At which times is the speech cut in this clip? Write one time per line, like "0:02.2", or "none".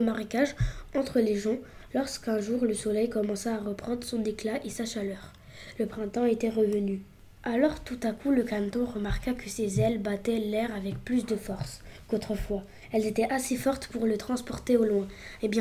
none